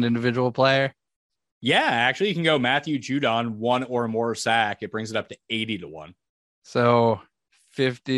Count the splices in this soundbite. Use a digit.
0